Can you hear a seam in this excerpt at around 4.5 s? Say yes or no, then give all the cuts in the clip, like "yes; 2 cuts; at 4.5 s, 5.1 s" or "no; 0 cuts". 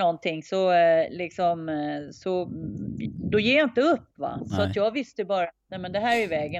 no; 0 cuts